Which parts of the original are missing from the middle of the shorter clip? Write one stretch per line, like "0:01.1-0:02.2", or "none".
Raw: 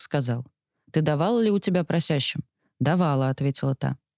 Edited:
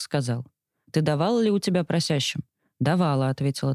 none